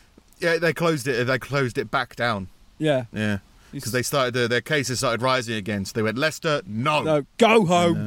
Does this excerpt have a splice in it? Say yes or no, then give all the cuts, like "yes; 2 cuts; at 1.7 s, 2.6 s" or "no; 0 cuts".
no; 0 cuts